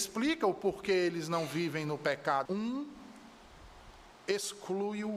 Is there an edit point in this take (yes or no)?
yes